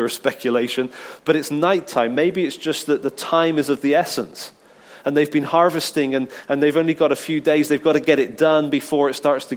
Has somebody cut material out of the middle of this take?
no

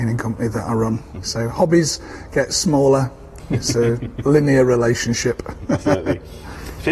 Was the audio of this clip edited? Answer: yes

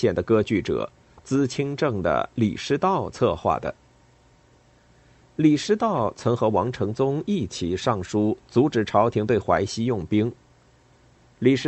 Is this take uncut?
yes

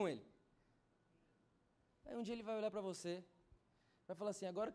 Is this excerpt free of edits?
yes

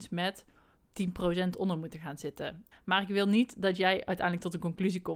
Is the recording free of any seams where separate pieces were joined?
no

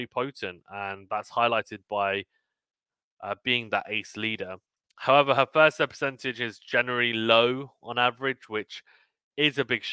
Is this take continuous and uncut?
yes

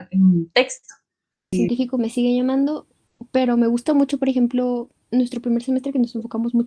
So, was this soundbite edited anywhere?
yes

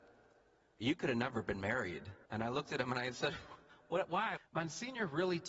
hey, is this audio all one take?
no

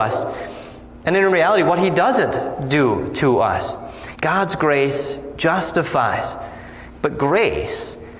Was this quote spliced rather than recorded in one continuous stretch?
yes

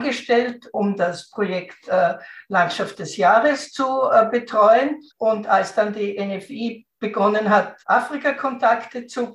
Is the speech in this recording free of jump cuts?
no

